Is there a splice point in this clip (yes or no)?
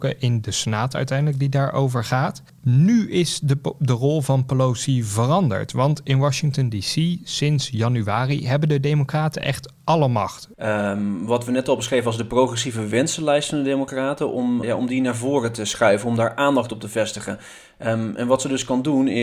yes